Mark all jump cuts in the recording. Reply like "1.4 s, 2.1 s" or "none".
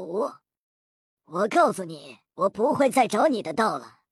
1.2 s, 2.3 s